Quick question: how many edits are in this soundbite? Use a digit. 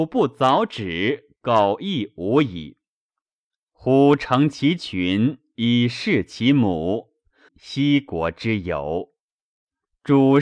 1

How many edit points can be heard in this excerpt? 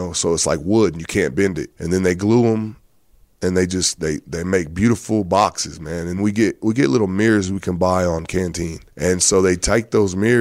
3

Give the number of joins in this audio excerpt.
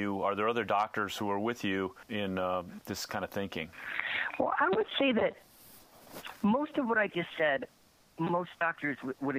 0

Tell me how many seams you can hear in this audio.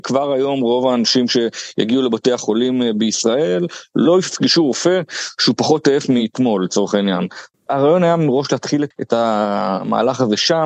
2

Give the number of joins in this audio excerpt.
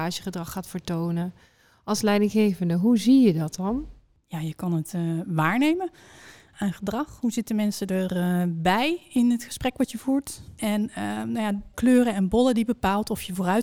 2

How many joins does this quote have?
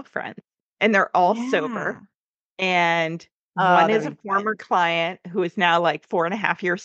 0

